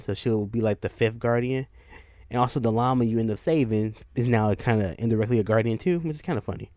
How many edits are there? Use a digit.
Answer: 1